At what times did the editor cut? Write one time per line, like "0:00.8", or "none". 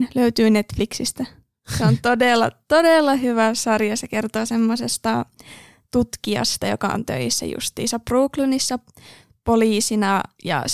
none